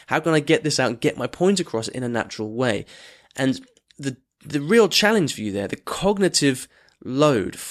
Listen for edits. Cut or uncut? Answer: uncut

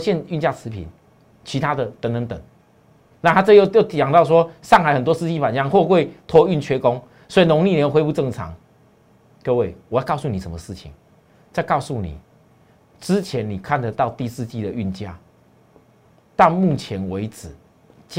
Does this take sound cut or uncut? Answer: uncut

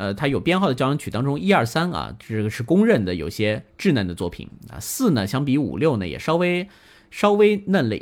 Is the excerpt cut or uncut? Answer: uncut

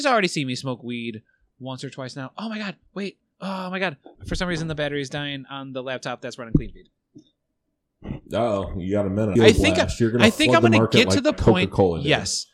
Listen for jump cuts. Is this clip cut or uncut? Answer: cut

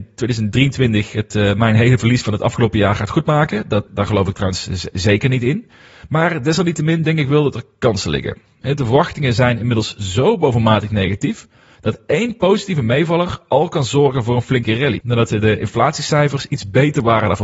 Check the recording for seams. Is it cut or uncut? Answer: cut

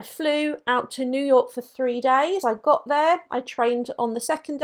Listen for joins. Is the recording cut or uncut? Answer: uncut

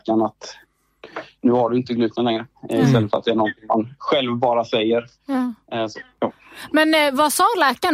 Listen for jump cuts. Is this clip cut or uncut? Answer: uncut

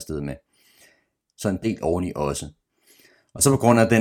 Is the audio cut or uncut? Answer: cut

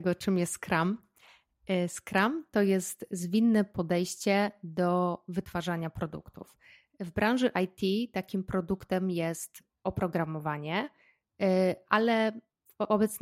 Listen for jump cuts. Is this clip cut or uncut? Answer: uncut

